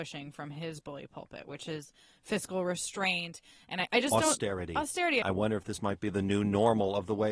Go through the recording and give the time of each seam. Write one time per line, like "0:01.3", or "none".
0:03.9
0:05.2

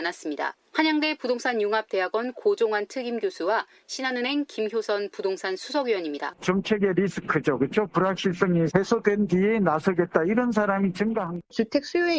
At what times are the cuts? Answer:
none

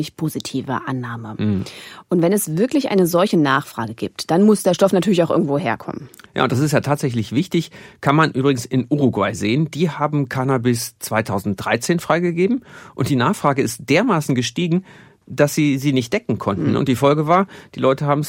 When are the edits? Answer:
none

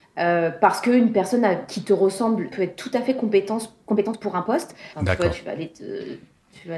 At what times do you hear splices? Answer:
0:02.5
0:04.9

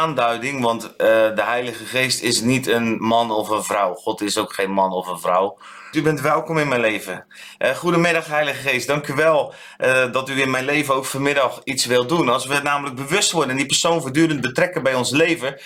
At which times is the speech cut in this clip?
0:05.9

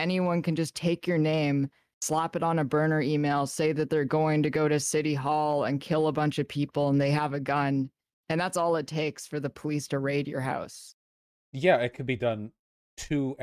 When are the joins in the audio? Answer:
none

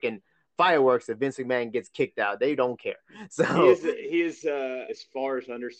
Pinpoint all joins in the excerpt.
0:04.9

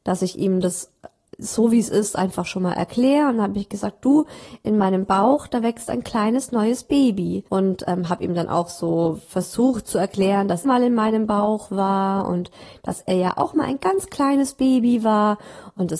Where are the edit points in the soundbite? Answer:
0:07.4
0:10.6

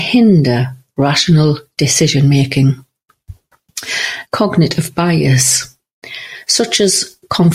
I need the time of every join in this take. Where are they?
0:04.2

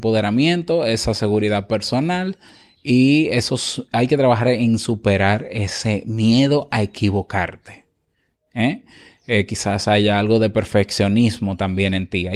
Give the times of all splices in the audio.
none

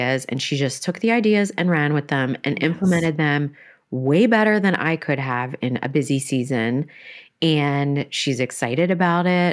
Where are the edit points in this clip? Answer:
none

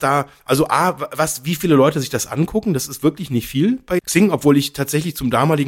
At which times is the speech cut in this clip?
none

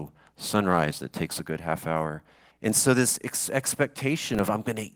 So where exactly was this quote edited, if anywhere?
0:02.5

